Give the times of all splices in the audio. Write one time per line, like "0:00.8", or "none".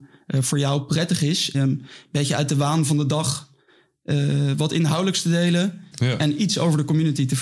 0:01.5
0:05.9